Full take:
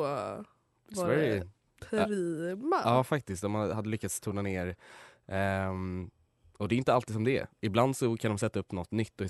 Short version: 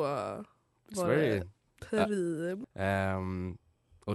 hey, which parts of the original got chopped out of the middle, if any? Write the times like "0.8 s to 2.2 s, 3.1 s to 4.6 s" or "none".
2.6 s to 5.2 s